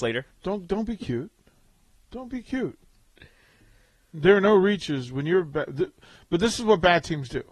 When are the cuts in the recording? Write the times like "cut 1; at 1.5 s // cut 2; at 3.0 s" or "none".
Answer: none